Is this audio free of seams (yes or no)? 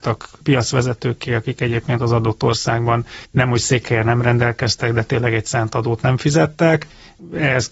yes